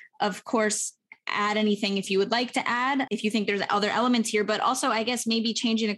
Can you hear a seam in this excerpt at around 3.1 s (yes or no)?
yes